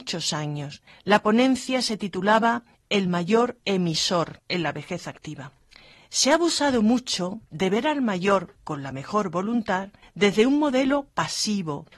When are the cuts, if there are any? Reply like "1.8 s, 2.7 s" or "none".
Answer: none